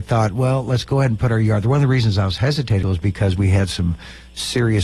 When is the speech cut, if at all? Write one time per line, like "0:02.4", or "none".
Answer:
0:02.8